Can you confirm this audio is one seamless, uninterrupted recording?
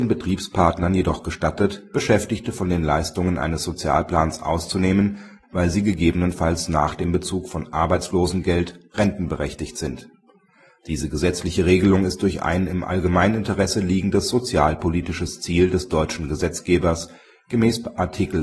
no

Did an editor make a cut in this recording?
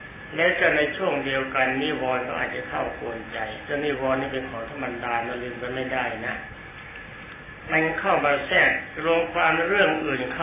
no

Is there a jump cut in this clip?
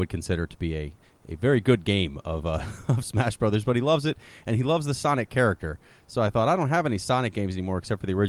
no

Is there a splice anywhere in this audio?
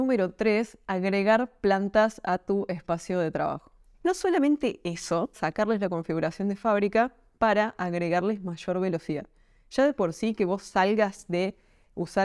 yes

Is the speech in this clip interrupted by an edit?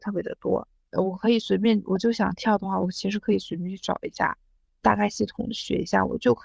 no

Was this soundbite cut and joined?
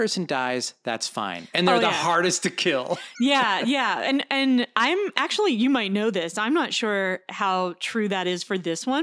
no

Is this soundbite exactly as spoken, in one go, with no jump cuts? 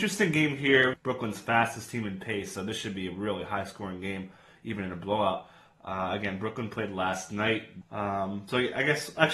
no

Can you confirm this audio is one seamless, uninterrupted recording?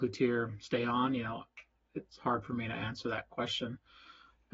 yes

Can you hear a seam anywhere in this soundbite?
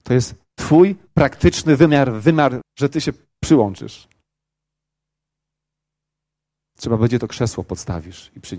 yes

